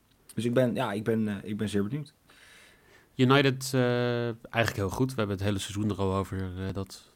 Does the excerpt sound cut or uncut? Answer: uncut